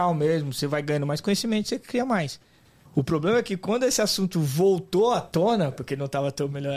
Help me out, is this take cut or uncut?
cut